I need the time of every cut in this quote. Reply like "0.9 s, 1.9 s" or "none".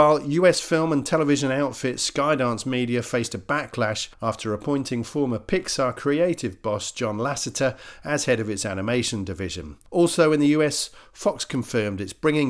9.9 s